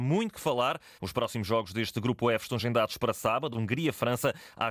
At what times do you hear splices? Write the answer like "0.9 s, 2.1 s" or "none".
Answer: 1.0 s, 3.5 s